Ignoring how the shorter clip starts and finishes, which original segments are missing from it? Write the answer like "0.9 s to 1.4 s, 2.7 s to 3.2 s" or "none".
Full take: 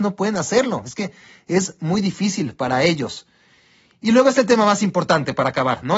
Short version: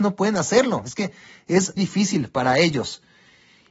1.8 s to 2.0 s